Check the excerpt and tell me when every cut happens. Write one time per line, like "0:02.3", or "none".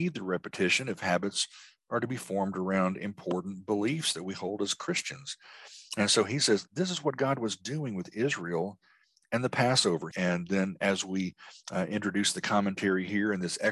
0:10.1